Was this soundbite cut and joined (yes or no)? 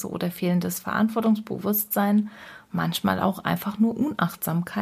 no